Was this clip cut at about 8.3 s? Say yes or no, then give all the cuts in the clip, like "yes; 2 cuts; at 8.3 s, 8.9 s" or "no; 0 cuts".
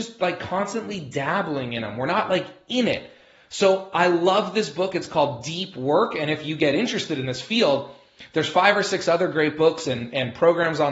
no; 0 cuts